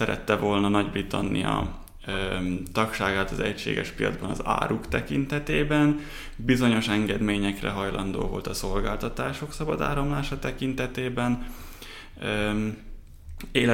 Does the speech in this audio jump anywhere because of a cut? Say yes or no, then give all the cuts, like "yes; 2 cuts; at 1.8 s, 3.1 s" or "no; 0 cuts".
no; 0 cuts